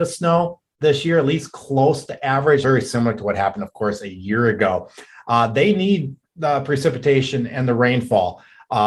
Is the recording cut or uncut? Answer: cut